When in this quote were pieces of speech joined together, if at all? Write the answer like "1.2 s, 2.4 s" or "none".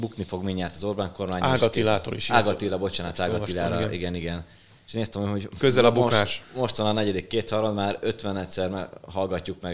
none

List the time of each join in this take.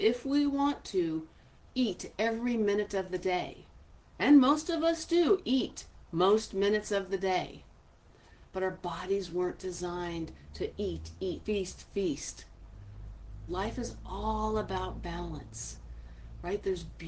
11.4 s, 13.5 s

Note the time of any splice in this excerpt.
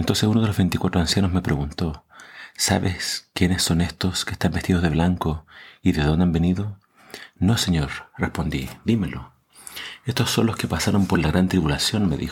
none

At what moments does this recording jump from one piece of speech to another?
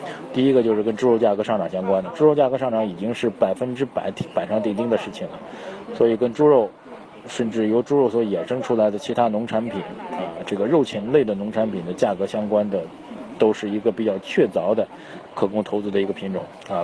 none

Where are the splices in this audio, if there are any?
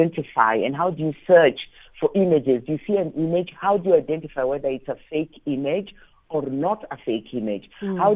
none

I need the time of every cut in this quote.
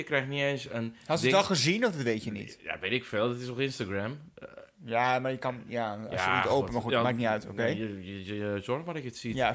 none

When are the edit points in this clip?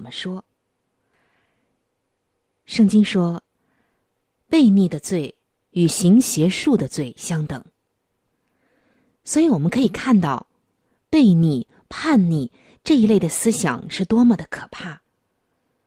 none

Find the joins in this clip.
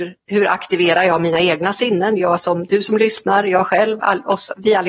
none

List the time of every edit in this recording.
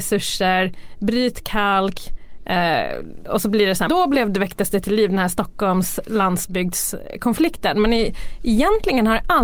3.9 s

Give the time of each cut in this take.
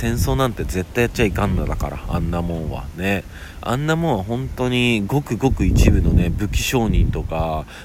none

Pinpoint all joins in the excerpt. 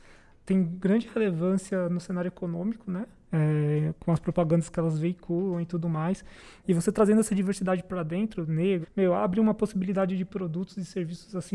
3.3 s, 6.6 s, 8.8 s

